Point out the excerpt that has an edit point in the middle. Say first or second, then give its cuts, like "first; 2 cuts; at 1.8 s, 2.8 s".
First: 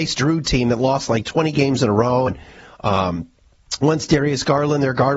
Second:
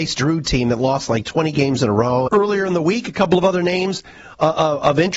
second; 1 cut; at 2.3 s